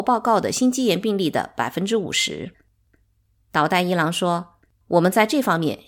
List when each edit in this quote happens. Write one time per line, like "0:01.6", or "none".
none